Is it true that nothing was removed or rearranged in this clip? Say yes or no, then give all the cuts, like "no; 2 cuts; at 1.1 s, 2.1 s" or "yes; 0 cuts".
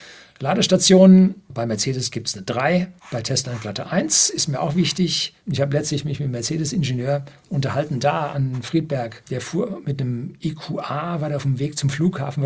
no; 2 cuts; at 3.0 s, 5.4 s